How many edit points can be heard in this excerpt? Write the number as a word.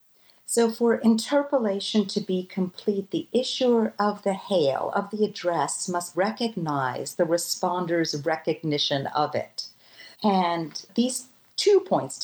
two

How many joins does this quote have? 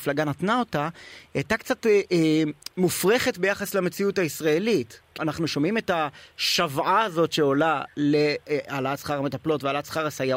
one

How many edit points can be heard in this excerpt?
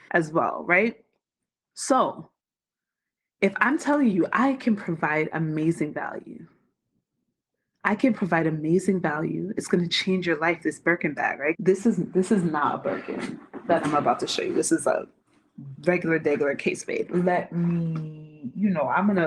two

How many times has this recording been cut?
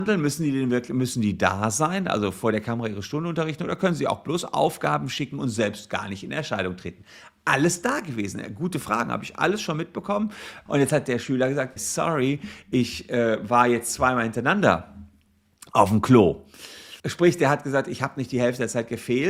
three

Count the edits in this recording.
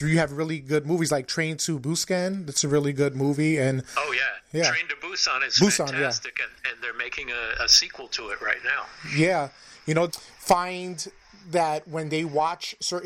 one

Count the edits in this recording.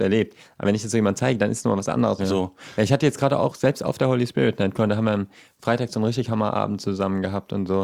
one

